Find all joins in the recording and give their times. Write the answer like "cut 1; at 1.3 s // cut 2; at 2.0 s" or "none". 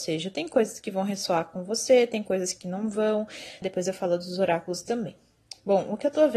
cut 1; at 3.6 s